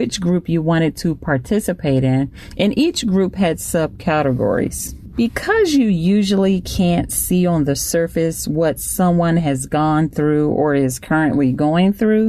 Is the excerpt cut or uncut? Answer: uncut